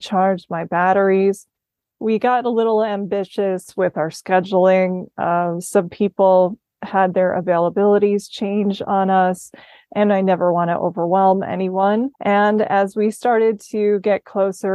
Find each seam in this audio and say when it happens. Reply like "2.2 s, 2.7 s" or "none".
1.9 s, 12.1 s